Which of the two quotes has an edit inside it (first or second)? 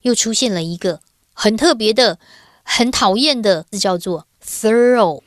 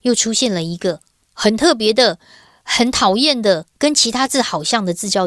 first